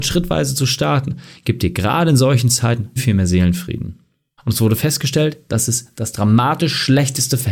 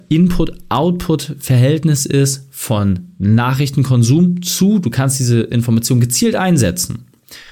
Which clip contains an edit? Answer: first; 2 cuts; at 3.0 s, 4.4 s

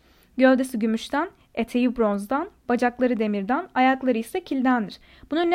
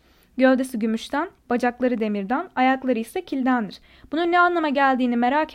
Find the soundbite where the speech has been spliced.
second; 1 cut; at 1.4 s

